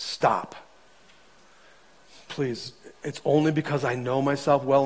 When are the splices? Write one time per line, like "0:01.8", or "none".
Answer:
none